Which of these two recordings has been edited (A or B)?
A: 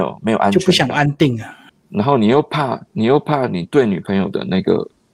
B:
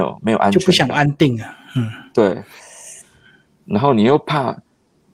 A